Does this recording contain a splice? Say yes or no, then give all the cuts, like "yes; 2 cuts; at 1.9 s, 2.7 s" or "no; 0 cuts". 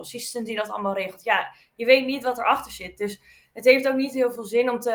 no; 0 cuts